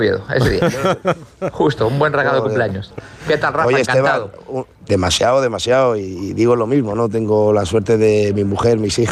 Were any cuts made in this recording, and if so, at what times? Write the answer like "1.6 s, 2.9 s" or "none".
4.8 s